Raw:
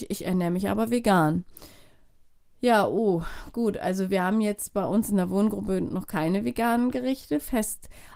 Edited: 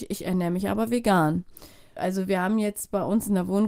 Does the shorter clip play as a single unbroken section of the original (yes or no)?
no